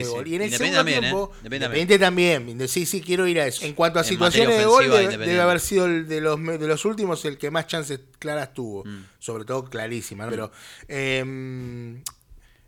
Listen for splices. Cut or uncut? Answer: cut